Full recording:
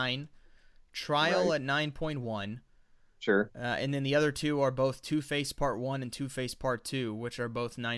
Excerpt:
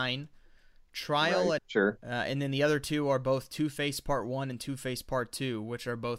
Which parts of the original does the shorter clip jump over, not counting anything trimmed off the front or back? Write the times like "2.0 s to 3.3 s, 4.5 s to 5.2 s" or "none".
1.6 s to 3.1 s